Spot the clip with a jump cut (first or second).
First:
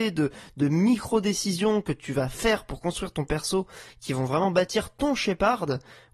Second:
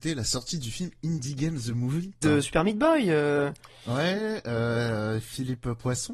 second